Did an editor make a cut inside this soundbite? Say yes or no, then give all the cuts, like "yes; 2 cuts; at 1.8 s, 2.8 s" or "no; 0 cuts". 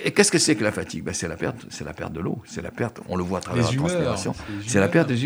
no; 0 cuts